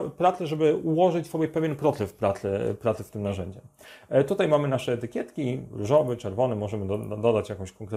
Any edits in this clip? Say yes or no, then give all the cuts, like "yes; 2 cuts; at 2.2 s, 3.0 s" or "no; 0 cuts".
no; 0 cuts